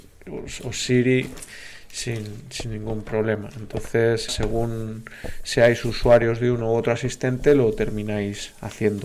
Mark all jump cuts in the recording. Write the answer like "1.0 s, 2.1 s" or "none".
4.3 s